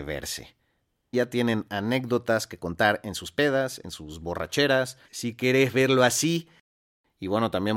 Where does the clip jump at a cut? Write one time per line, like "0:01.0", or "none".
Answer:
0:01.1
0:05.1